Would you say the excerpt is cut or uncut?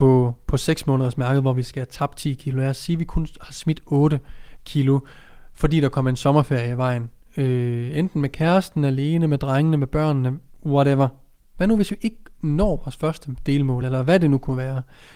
cut